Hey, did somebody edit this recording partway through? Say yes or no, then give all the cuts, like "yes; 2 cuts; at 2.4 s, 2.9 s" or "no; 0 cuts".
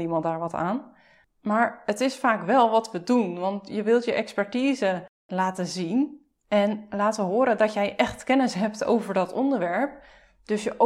no; 0 cuts